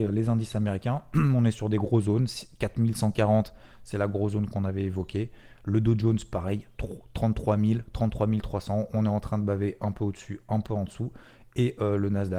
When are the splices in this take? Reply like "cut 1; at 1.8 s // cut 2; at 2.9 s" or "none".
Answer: none